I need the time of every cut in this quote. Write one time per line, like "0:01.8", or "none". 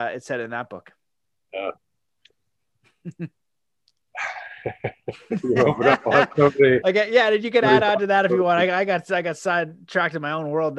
none